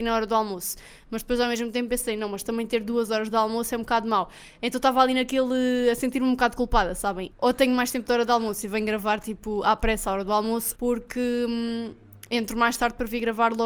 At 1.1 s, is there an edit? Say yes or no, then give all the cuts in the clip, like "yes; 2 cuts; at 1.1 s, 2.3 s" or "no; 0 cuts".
no; 2 cuts; at 7.3 s, 10.7 s